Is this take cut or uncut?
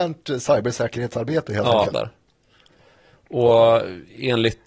cut